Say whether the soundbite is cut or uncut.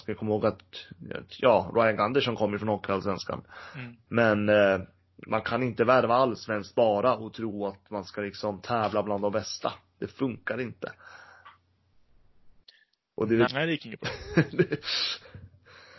cut